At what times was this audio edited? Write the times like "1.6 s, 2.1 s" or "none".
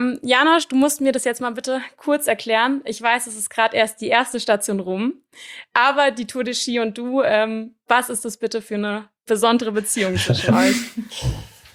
none